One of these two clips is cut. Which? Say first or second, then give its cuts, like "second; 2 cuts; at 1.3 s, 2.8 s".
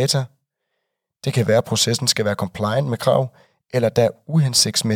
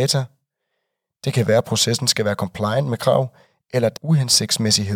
second; 1 cut; at 4.0 s